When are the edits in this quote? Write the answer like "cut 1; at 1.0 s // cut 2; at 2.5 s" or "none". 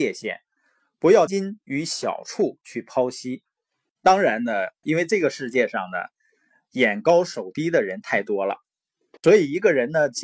cut 1; at 1.3 s // cut 2; at 4.8 s